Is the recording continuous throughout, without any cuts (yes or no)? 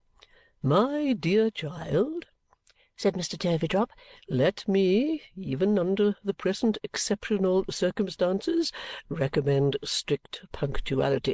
yes